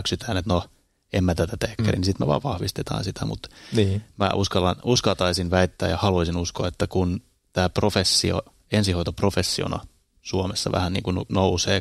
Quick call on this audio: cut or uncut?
cut